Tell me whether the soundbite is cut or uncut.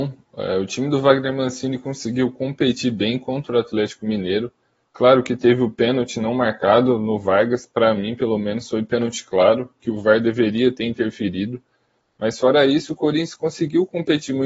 uncut